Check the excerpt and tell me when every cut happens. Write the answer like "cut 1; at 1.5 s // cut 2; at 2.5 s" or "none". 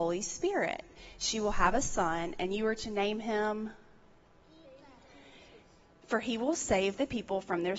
none